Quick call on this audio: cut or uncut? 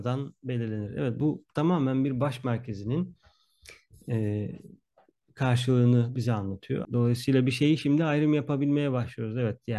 cut